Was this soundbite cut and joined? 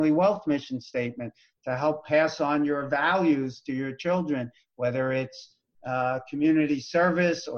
no; 0 cuts

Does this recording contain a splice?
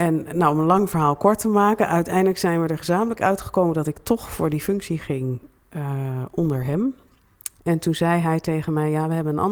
yes; 1 cut; at 7.6 s

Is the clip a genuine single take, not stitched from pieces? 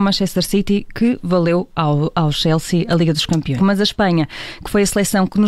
no; 1 cut; at 3.6 s

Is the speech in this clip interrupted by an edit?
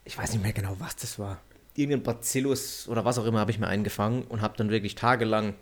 no; 0 cuts

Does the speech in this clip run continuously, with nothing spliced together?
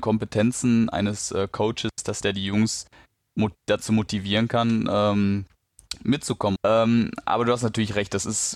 no; 1 cut; at 6.6 s

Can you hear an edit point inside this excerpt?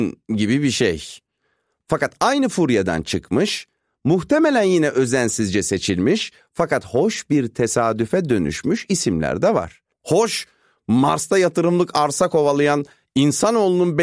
yes; 1 cut; at 9.9 s

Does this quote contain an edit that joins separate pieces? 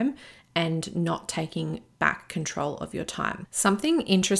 no; 0 cuts

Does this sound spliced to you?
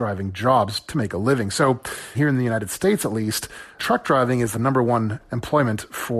yes; 2 cuts; at 2.1 s, 3.8 s

